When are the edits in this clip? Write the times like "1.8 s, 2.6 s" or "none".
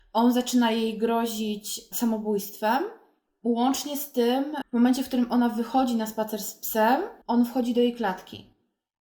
4.6 s, 7.2 s